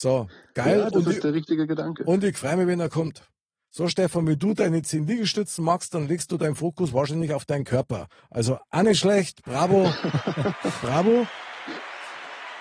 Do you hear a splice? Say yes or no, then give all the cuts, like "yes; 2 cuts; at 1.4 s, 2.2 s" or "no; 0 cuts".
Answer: no; 0 cuts